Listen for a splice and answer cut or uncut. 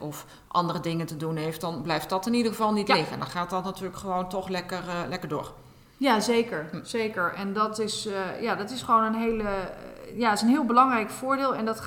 uncut